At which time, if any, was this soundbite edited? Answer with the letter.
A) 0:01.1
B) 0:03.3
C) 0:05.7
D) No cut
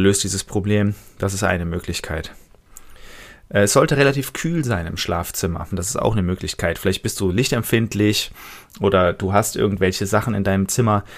C